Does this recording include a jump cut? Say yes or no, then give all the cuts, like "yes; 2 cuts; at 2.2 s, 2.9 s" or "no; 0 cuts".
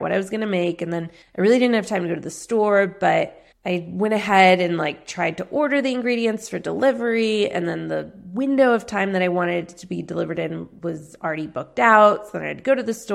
no; 0 cuts